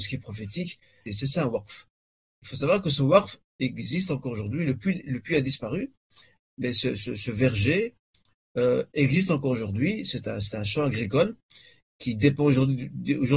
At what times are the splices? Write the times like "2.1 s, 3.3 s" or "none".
1.1 s